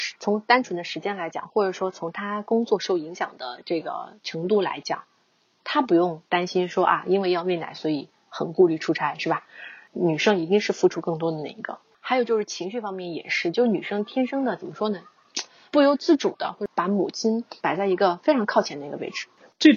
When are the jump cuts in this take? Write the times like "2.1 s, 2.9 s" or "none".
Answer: 15.7 s, 17.6 s